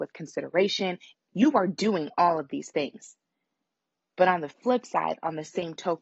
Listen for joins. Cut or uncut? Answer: cut